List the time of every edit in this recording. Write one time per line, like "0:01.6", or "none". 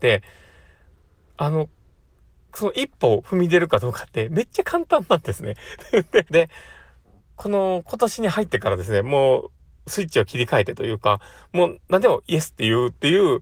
0:06.3